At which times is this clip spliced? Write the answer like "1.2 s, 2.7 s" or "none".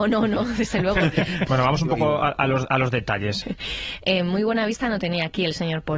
1.5 s, 3.4 s